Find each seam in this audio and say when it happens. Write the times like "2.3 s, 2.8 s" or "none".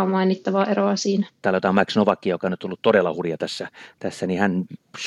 1.4 s